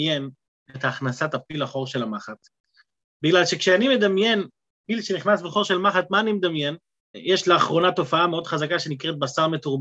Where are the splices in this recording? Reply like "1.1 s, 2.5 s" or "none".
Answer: 7.1 s